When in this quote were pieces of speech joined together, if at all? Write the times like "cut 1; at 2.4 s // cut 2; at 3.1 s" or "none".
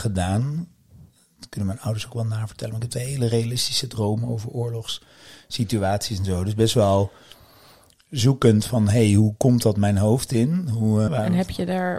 cut 1; at 11.1 s